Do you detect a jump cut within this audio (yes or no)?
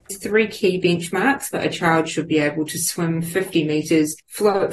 yes